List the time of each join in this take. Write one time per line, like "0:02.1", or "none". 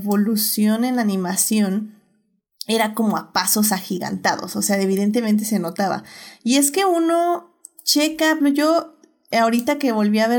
0:08.4